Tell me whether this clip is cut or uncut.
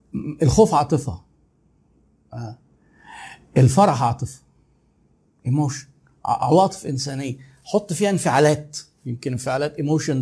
uncut